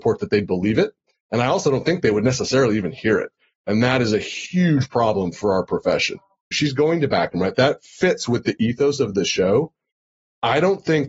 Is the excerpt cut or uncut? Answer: cut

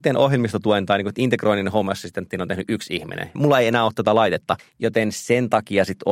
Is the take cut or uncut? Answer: cut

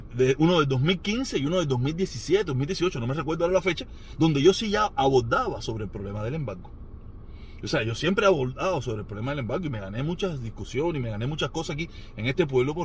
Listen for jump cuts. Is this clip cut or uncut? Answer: uncut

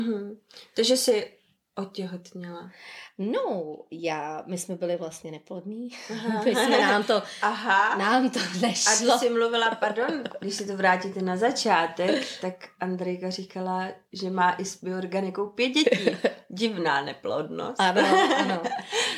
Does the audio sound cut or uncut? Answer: uncut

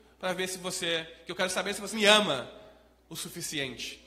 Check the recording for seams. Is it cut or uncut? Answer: cut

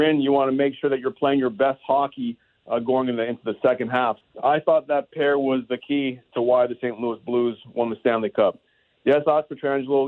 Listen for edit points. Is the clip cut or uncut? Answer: cut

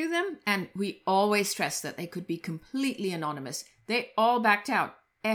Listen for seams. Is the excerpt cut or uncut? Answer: uncut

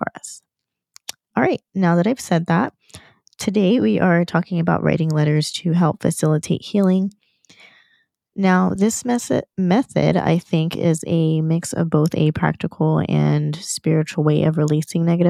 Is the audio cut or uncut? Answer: uncut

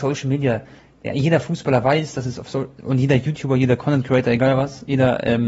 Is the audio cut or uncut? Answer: uncut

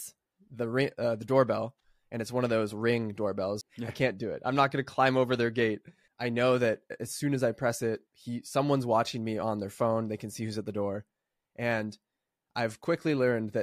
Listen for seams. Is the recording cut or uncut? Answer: cut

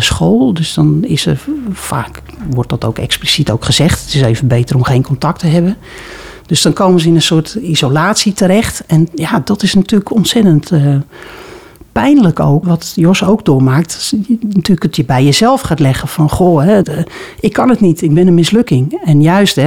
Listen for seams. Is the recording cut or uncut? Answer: cut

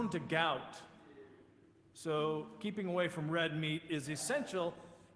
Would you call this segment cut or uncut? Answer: uncut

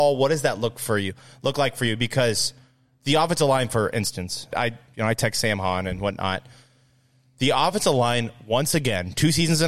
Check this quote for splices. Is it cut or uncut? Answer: cut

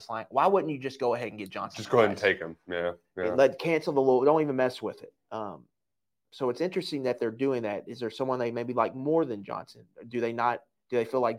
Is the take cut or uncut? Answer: uncut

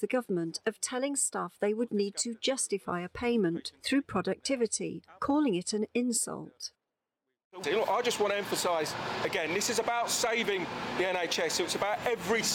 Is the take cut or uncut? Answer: cut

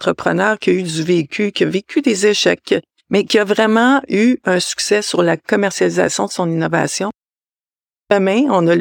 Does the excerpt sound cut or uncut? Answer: uncut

